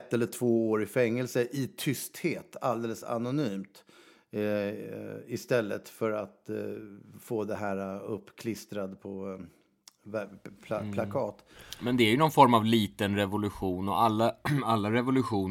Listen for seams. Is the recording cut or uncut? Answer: uncut